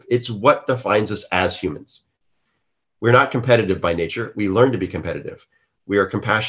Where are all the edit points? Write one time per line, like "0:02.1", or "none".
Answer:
none